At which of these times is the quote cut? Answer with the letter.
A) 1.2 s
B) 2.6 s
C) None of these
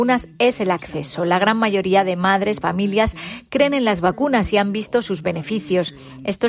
B